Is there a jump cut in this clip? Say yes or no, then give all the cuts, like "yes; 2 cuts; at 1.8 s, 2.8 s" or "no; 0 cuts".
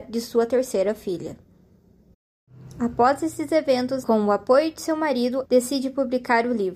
yes; 2 cuts; at 4.0 s, 5.5 s